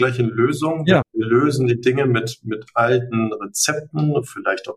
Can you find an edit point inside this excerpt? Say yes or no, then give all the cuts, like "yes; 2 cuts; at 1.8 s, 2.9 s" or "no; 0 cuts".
yes; 1 cut; at 1.0 s